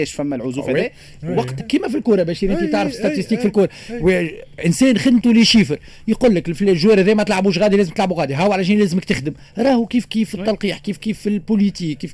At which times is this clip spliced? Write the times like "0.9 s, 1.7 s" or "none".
1.6 s